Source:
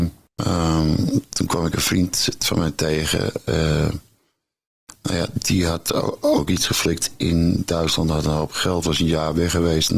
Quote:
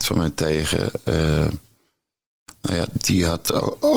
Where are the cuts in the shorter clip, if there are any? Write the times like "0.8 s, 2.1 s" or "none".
none